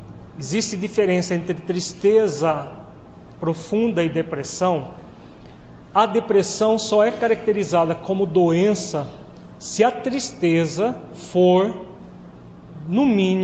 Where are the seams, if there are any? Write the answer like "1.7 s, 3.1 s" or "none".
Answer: 5.8 s